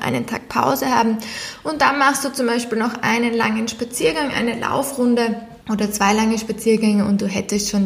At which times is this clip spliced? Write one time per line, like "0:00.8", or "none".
0:05.6